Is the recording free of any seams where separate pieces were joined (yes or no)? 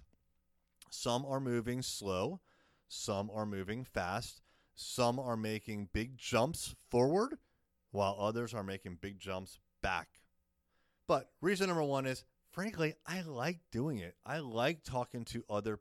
no